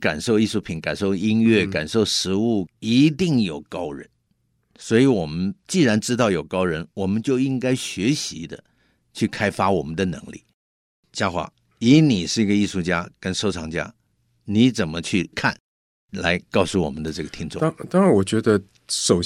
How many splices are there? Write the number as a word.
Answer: one